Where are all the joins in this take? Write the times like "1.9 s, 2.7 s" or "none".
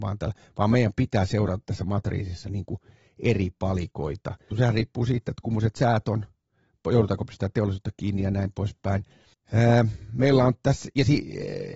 4.5 s, 9.3 s

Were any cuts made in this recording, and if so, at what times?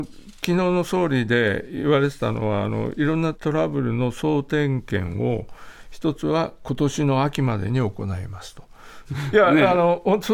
3.3 s, 9.0 s

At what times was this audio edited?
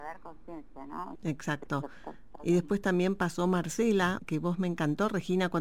1.2 s, 4.2 s

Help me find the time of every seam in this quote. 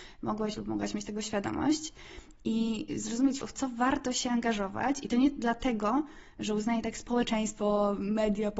3.4 s

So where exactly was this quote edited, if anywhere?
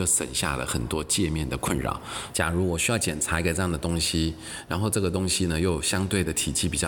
2.3 s

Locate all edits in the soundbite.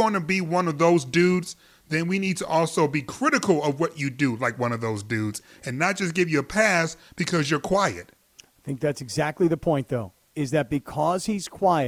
none

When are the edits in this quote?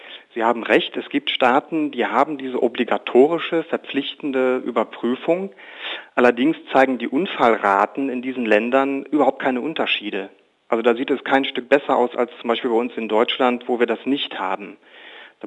none

